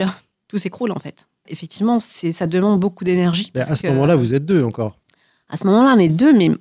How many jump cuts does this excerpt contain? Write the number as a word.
one